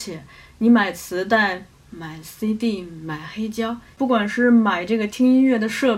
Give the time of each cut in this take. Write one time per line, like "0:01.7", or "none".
0:04.0